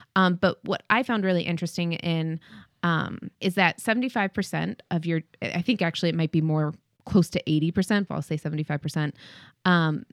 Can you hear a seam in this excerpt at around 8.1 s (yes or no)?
yes